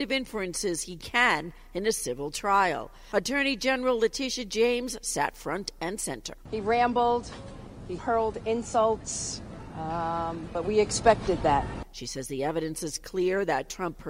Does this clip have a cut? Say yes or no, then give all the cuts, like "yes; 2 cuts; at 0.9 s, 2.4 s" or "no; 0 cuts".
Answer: no; 0 cuts